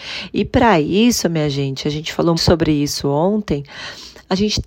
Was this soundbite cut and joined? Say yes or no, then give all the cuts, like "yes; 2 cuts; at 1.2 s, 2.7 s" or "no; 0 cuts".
yes; 1 cut; at 2.3 s